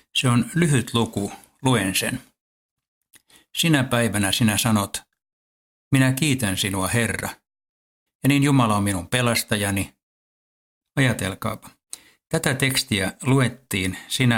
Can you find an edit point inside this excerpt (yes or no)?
yes